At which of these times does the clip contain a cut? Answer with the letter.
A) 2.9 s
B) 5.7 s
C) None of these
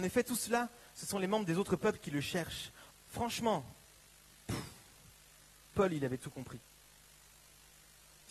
A